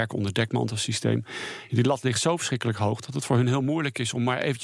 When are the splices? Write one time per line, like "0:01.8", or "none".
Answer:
none

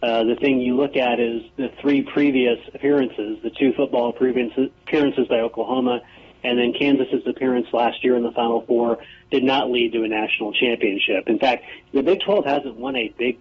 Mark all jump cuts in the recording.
0:01.5

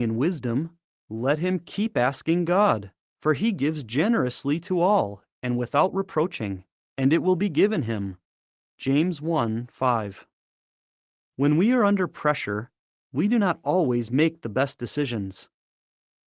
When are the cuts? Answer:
none

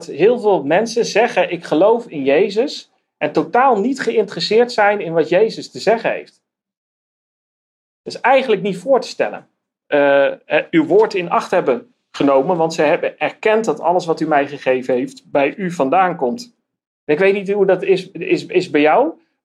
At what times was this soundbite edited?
0:09.8
0:16.9

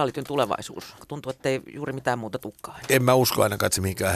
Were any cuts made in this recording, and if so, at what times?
0:01.0

